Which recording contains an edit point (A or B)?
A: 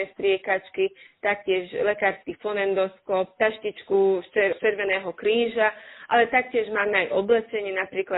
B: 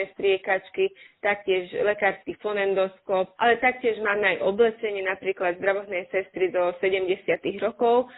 B